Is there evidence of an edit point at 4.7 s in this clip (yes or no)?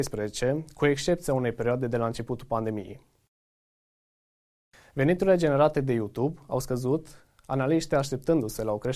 no